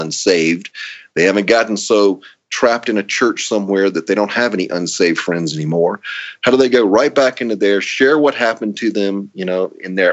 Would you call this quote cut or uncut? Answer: uncut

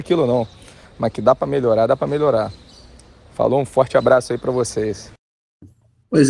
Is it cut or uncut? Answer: uncut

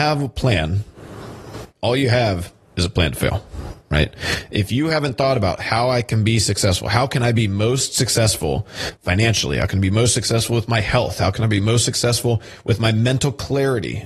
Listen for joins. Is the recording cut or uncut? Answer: uncut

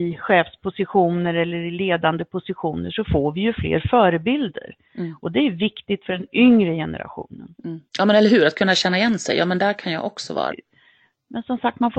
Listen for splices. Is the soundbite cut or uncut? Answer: cut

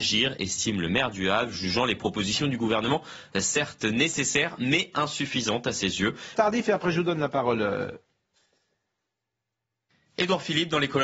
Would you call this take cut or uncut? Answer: cut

